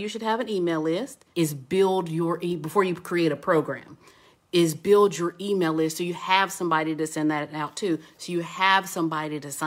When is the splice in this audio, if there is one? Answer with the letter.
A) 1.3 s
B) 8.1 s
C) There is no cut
A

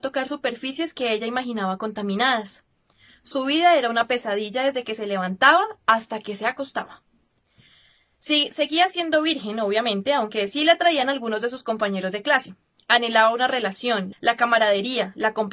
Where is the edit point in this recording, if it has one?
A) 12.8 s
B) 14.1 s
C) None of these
B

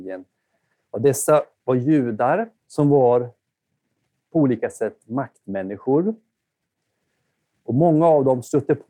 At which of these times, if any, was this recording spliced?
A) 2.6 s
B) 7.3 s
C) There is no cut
A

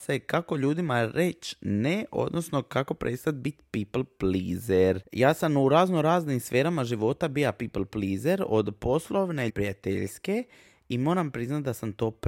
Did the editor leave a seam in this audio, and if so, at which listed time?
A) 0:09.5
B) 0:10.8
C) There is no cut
A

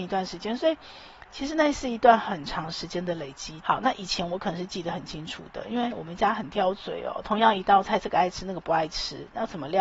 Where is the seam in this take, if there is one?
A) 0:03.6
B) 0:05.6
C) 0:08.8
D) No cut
A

